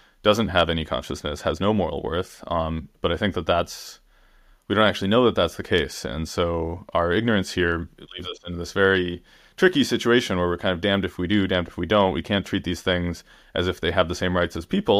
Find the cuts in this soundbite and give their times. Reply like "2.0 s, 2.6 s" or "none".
none